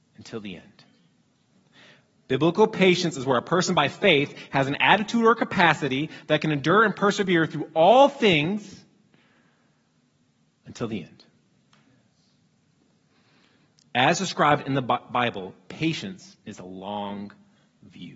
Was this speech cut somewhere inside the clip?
no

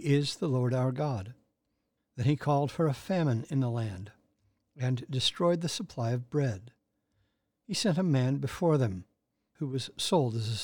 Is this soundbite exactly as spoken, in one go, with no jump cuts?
no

